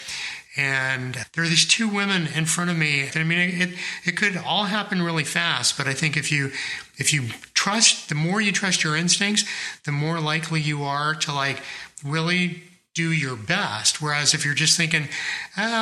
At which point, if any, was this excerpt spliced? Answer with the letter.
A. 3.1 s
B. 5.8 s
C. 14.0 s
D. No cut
A